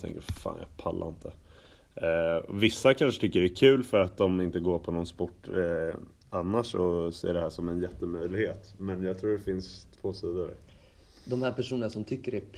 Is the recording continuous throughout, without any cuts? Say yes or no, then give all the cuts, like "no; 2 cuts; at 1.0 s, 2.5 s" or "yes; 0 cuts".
no; 1 cut; at 9.9 s